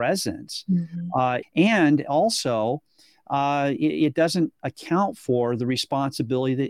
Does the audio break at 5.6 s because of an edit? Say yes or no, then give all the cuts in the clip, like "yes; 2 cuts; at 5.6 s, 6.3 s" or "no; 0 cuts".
no; 2 cuts; at 1.4 s, 3.8 s